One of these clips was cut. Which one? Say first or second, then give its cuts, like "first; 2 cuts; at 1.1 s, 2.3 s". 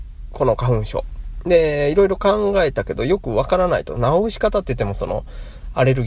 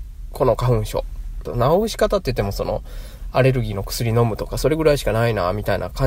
second; 1 cut; at 1.4 s